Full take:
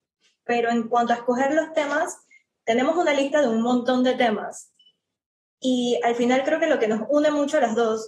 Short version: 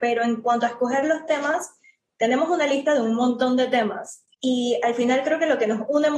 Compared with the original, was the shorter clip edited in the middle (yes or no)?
yes